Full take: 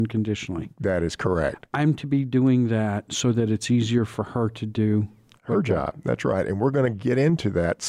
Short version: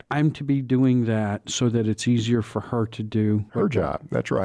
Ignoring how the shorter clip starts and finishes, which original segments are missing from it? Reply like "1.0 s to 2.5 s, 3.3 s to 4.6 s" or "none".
5.1 s to 5.4 s

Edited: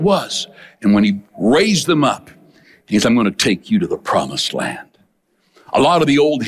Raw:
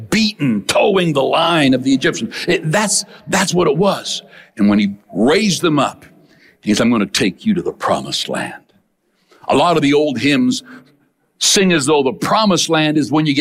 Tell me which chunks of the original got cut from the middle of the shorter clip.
none

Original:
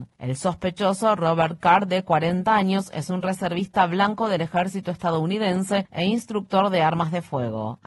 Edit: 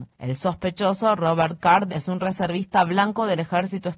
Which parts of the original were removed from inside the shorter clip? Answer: 1.9 s to 2.9 s

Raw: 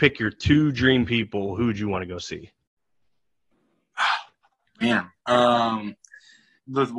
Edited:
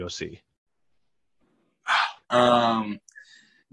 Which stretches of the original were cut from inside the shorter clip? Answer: 4.3 s to 5.2 s

